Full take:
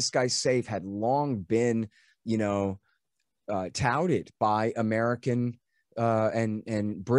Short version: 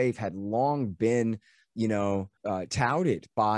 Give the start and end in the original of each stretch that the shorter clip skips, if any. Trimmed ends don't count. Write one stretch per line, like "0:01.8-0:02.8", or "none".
0:02.9-0:03.4

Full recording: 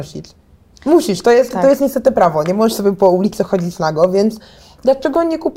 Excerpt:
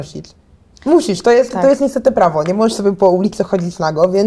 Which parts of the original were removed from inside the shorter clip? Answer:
none

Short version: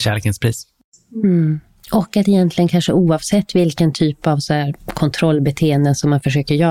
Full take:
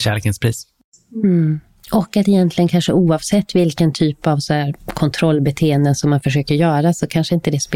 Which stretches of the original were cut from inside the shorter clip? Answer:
none

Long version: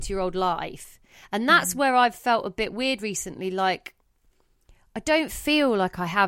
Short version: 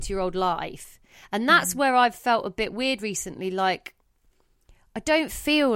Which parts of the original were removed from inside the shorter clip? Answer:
none

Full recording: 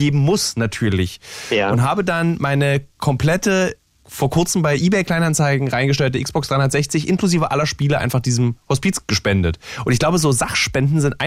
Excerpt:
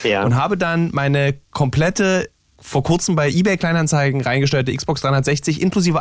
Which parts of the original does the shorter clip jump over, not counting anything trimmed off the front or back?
none

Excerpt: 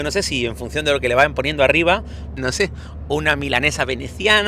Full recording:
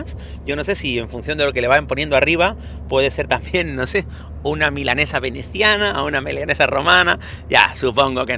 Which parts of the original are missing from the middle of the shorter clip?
0:02.9-0:03.7

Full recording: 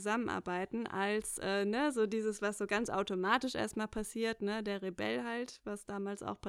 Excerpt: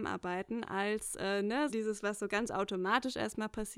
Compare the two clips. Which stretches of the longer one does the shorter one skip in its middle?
0:01.9-0:02.1

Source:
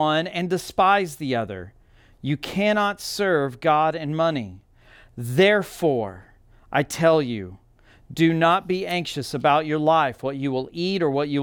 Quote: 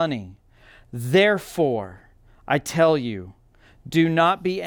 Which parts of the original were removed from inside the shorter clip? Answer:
none

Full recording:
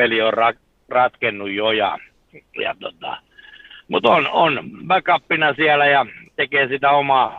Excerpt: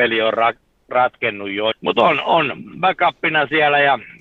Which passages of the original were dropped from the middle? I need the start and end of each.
0:01.7-0:03.8

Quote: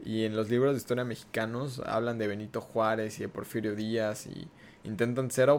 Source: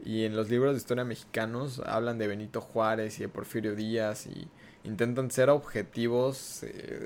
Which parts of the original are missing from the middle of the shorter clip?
none

